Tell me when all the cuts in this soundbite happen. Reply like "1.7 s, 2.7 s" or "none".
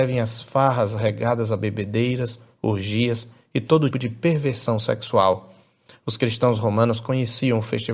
3.9 s

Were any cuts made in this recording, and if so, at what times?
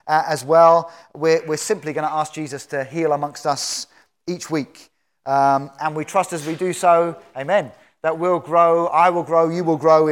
none

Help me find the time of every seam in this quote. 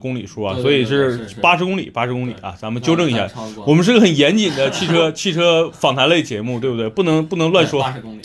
none

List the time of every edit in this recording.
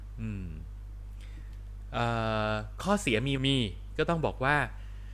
3.4 s

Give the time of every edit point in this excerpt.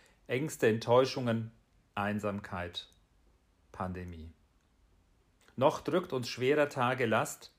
5.4 s

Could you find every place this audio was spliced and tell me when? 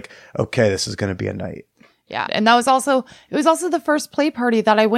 2.3 s

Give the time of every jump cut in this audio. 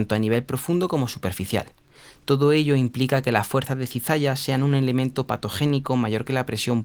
2.1 s

